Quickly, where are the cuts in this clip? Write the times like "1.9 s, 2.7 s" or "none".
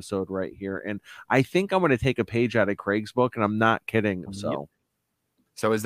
4.3 s